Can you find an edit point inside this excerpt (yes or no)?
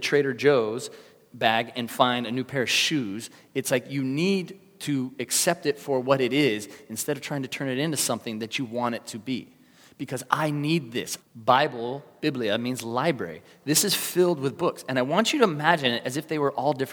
yes